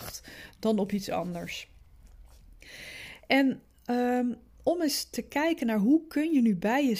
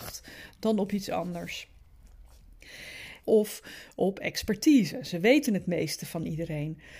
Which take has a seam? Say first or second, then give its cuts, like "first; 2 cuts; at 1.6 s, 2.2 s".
second; 1 cut; at 3.2 s